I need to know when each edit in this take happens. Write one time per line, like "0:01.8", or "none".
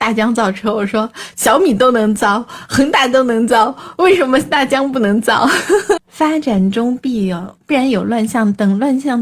0:06.0